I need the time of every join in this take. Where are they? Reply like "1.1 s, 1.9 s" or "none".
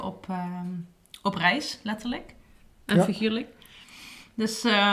none